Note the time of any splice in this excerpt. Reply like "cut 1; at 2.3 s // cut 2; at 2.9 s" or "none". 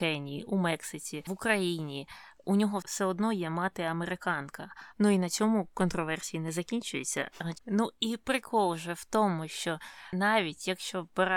cut 1; at 4.9 s // cut 2; at 7.5 s